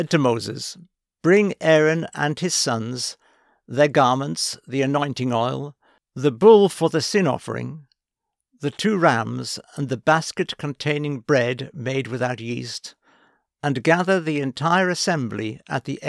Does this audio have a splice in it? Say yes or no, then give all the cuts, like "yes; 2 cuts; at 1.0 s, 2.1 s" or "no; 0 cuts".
no; 0 cuts